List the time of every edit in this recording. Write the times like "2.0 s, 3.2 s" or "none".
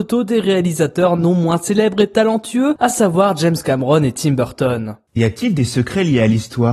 none